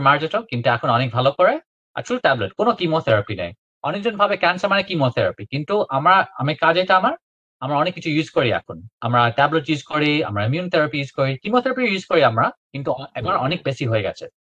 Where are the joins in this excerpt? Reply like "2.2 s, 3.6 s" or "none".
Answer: 12.6 s